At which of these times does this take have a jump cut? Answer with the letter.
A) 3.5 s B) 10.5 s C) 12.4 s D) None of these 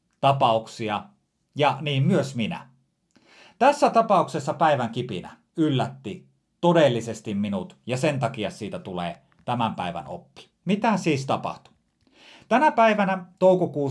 D